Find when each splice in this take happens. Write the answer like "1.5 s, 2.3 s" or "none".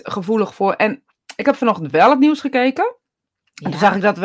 none